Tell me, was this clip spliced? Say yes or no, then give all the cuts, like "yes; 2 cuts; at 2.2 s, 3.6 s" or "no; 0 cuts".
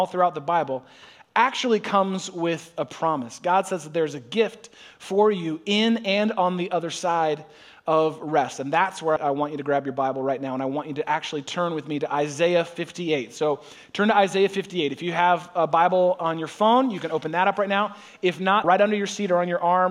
yes; 2 cuts; at 9.2 s, 18.6 s